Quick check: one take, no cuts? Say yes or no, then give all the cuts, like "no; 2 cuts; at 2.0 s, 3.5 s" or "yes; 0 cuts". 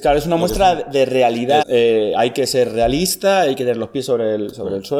no; 1 cut; at 1.6 s